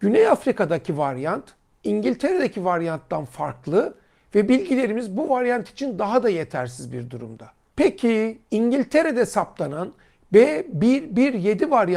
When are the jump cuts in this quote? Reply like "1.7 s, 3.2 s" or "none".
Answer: none